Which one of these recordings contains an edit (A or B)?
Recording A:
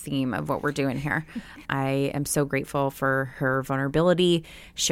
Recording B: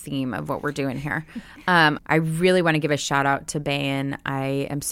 A